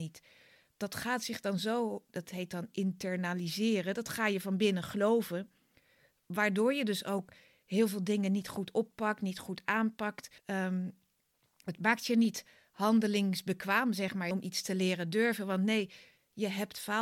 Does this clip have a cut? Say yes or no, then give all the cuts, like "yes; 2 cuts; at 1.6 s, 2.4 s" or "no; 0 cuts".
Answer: yes; 2 cuts; at 10.4 s, 14.3 s